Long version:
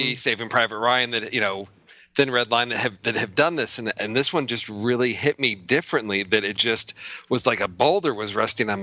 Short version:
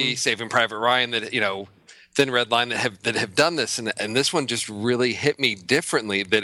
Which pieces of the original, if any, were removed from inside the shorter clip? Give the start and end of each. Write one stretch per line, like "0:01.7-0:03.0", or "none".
none